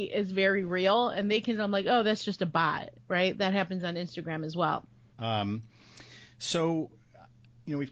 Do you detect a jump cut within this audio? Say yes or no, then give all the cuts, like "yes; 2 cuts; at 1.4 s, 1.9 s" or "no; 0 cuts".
yes; 1 cut; at 5.1 s